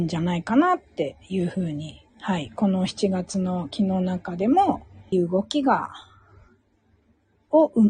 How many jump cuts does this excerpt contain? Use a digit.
1